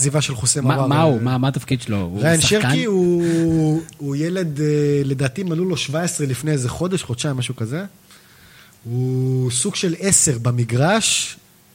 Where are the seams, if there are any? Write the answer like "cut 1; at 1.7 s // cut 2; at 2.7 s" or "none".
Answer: none